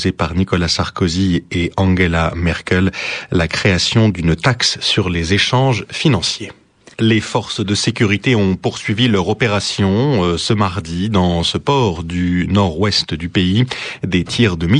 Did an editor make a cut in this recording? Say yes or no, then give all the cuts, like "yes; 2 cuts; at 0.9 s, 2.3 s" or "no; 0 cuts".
yes; 1 cut; at 6.9 s